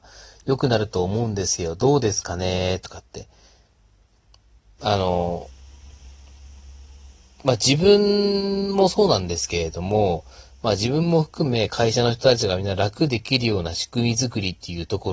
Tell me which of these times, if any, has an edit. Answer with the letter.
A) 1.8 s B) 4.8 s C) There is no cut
B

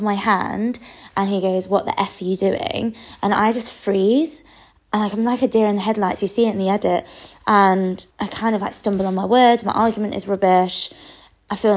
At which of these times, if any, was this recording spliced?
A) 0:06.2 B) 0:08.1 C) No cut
B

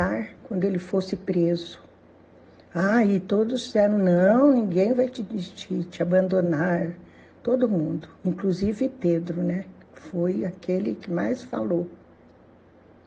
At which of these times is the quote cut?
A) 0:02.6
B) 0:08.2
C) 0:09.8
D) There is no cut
B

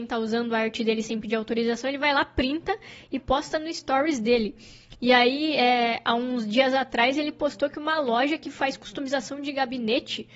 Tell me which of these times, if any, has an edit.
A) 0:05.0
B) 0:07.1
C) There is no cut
C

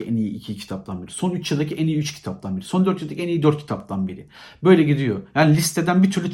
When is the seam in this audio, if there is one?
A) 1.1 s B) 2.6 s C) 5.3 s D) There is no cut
D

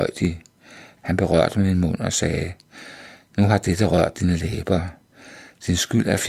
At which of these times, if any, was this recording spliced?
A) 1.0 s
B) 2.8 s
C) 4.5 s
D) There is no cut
A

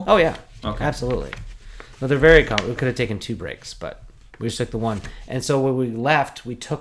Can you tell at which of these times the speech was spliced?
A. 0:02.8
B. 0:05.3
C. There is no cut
A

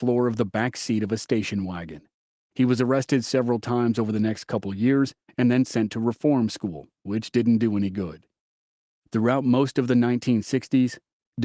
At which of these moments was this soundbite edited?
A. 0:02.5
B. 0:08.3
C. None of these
A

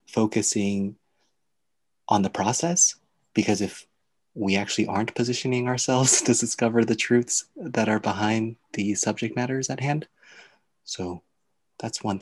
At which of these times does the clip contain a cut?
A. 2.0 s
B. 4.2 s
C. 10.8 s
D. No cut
B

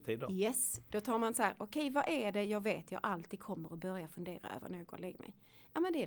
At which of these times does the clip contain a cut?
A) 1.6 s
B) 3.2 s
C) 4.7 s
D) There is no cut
D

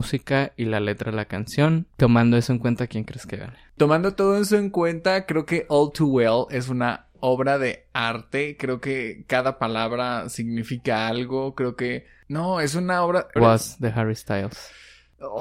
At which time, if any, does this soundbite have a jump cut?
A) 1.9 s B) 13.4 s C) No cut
B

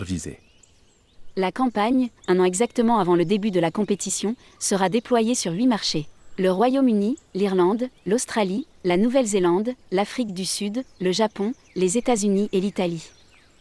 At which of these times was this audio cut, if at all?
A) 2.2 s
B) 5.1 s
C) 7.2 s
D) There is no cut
A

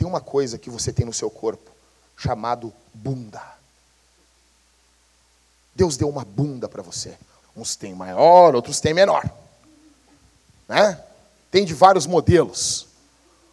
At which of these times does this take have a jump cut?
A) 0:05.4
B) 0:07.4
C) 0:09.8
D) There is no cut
B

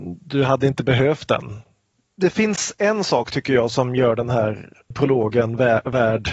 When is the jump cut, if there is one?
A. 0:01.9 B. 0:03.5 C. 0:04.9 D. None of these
C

